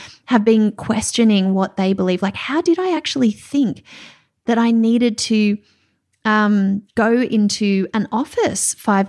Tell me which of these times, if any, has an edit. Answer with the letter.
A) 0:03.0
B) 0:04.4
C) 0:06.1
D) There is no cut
D